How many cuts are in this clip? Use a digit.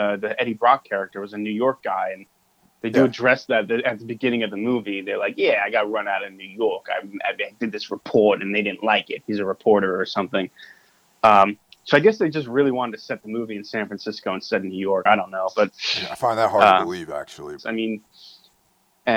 2